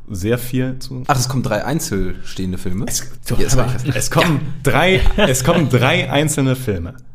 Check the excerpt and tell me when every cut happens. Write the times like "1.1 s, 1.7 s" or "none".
1.0 s, 3.2 s

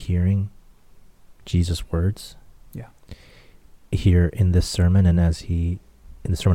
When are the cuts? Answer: none

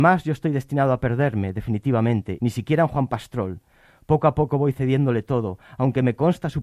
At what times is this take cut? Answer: 2.4 s

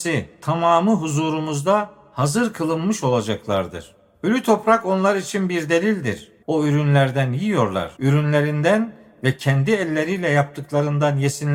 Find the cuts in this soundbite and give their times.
6.4 s, 8.0 s

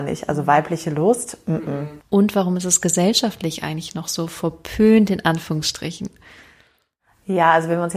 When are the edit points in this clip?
2.0 s

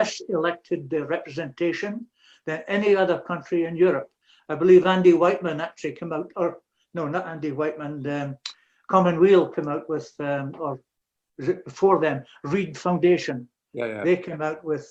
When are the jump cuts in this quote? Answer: none

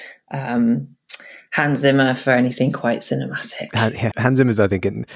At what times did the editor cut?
4.1 s

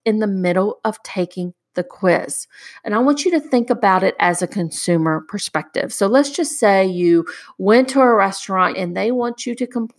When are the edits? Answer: 8.7 s

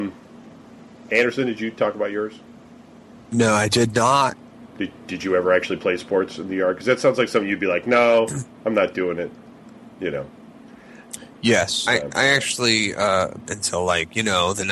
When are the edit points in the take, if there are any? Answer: 11.8 s, 13.5 s

